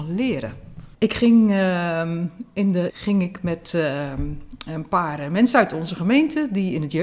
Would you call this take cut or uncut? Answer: cut